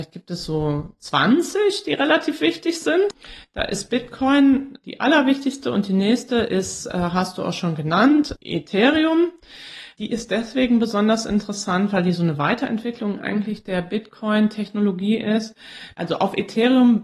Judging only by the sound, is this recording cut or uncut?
uncut